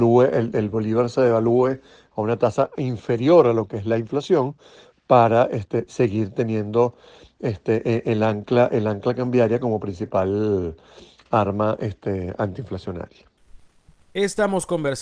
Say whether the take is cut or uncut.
uncut